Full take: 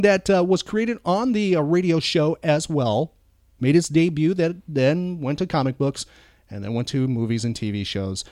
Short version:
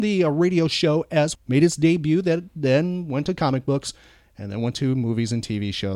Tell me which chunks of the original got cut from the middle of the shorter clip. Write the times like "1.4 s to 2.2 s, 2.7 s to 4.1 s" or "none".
2.7 s to 3.5 s

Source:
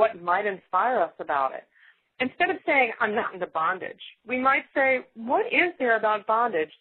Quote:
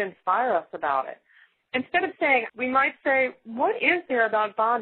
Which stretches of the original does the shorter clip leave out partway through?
3.0 s to 4.2 s

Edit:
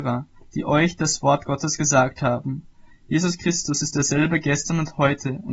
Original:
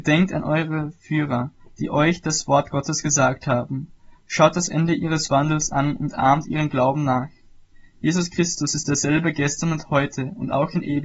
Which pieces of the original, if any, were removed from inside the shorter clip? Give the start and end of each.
4.1 s to 7.8 s

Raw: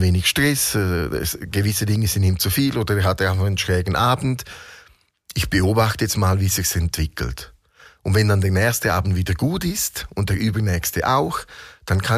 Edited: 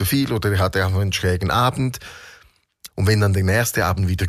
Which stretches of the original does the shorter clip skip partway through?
5.3 s to 8.0 s

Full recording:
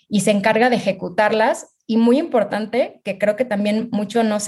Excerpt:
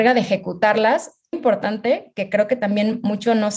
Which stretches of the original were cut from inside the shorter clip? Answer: 1.9 s to 2.2 s

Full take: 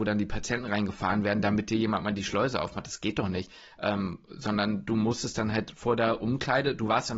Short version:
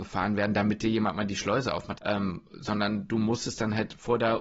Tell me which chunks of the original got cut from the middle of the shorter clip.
2.8 s to 3.7 s

